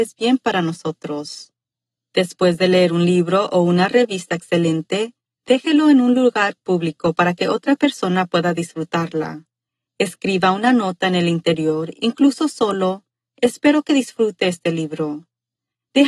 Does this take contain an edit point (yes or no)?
no